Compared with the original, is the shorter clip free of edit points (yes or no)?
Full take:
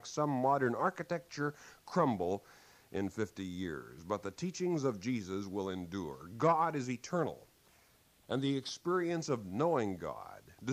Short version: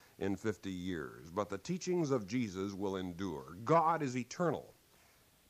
yes